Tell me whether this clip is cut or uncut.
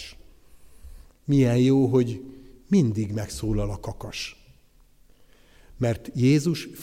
cut